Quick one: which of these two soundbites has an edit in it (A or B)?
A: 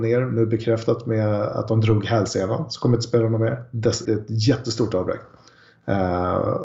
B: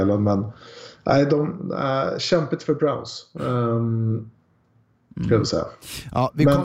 A